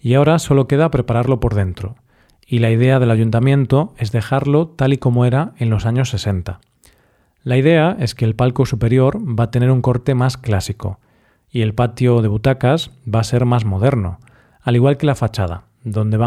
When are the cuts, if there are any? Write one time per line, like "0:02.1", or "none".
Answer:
none